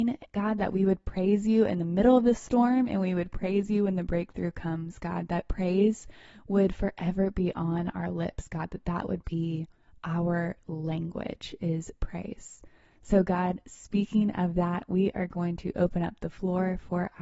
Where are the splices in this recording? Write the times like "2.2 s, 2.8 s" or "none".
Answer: none